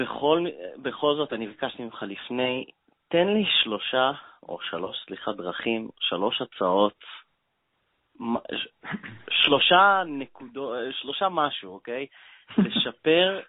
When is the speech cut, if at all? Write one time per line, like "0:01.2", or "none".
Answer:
none